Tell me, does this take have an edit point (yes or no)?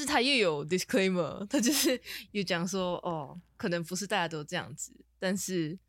no